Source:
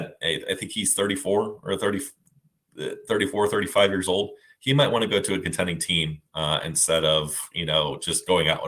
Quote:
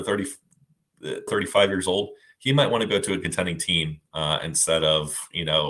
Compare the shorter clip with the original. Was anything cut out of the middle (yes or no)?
yes